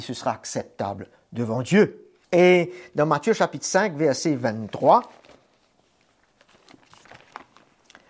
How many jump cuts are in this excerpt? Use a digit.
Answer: 1